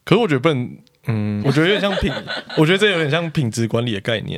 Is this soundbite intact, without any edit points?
no; 1 cut; at 1.4 s

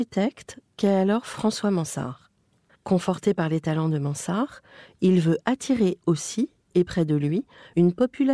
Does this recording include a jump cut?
yes; 1 cut; at 2.7 s

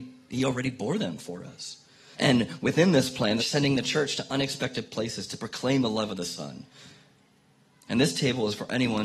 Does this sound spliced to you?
yes; 2 cuts; at 2.1 s, 3.4 s

